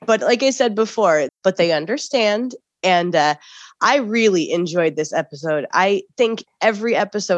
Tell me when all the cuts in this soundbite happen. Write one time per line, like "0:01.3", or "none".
0:01.3